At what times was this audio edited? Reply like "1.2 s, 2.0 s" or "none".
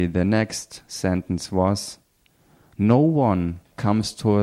none